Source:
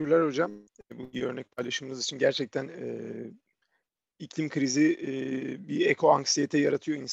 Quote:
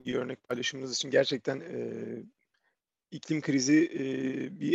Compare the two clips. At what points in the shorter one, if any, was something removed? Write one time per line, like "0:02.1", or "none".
none